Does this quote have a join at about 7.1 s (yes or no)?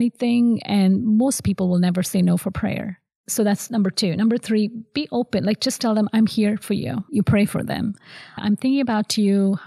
yes